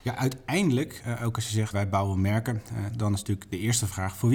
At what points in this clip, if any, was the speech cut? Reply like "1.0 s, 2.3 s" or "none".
1.7 s, 2.9 s